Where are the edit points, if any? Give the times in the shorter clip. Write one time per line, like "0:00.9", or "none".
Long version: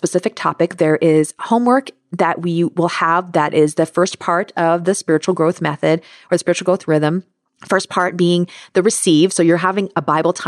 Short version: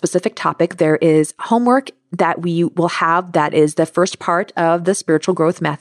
none